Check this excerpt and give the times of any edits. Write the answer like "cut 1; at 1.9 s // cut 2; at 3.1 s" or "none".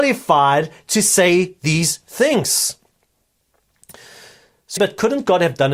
cut 1; at 4.8 s